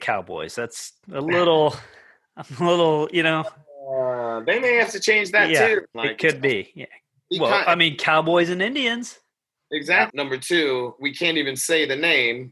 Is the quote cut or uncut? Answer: cut